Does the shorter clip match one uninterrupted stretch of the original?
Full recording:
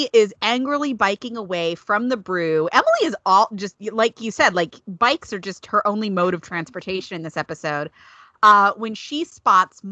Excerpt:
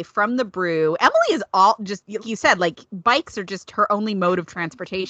no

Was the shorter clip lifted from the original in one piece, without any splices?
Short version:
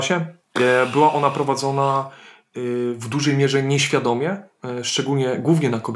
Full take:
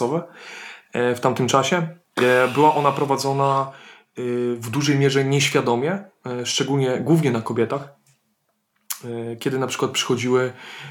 yes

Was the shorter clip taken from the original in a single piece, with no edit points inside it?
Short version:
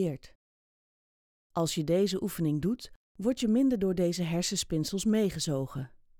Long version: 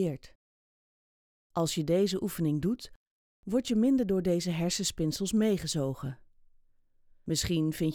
no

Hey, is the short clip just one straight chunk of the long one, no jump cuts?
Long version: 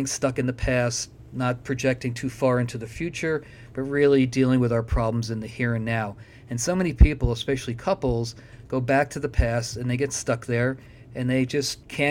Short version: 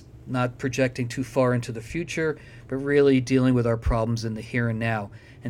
yes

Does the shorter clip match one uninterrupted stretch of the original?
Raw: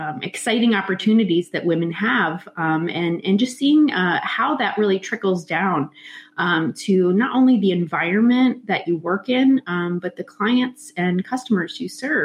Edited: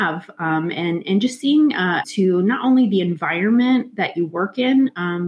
no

